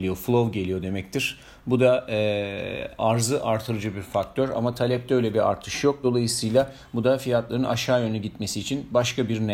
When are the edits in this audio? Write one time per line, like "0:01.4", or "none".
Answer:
none